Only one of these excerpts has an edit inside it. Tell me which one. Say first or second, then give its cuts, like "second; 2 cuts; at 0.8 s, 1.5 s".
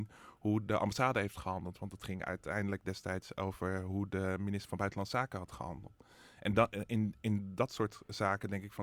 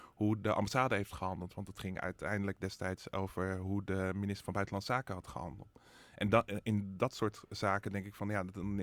second; 1 cut; at 6.6 s